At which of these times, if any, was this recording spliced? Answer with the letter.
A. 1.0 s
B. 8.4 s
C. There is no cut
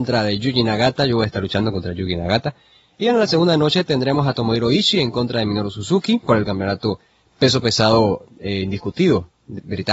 C